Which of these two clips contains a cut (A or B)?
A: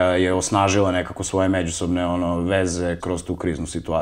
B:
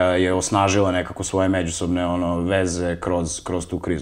A